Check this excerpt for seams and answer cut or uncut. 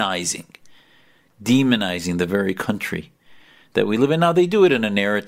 uncut